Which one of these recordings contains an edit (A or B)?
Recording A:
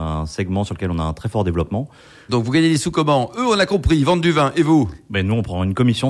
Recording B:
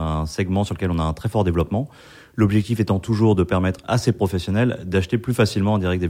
A